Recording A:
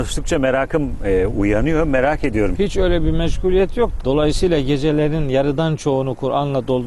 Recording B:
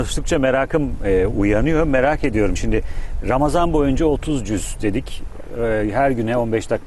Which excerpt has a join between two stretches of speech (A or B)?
A